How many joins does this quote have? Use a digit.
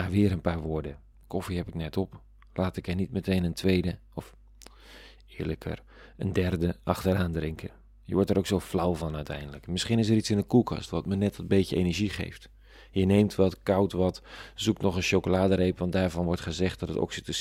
1